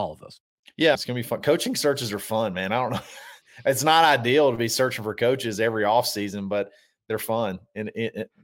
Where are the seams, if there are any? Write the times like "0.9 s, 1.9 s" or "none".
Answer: 0.9 s